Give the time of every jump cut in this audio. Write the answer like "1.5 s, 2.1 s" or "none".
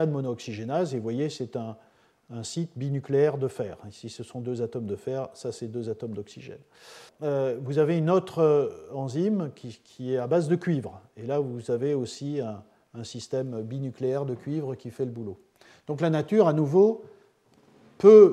7.1 s